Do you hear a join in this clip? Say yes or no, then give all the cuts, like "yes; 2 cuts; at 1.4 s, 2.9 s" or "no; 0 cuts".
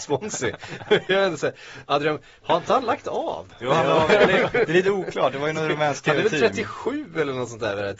no; 0 cuts